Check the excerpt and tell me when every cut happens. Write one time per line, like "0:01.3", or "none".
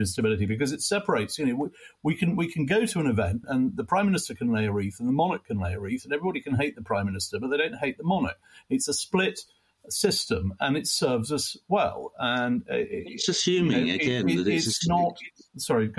none